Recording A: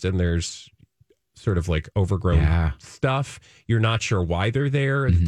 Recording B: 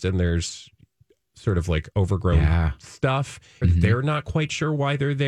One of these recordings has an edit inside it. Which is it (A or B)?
B